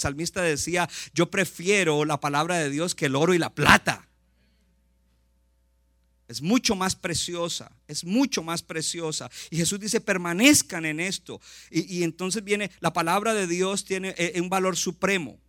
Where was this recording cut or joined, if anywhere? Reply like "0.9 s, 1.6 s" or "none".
none